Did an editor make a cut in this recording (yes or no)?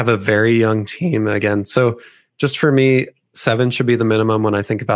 yes